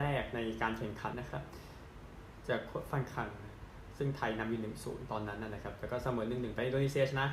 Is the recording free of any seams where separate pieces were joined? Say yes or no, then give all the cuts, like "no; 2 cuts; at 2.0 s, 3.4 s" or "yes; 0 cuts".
no; 1 cut; at 1.1 s